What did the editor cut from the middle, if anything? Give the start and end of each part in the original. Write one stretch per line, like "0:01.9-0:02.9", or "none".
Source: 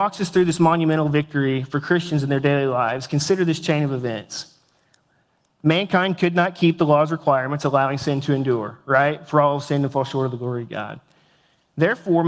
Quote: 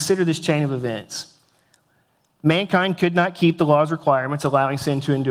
none